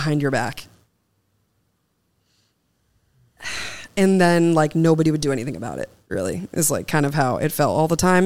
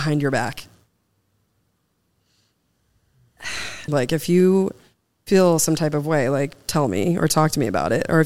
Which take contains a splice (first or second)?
second